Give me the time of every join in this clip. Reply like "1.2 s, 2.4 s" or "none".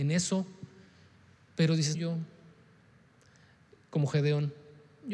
1.9 s